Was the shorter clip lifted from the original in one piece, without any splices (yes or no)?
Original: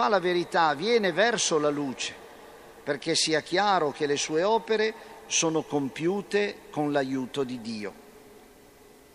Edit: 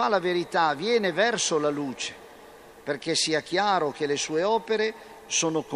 yes